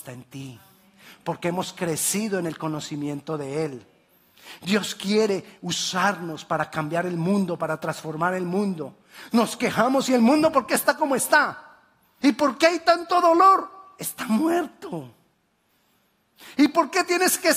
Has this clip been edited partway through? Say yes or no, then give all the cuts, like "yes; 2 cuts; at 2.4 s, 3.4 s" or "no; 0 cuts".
yes; 1 cut; at 12.2 s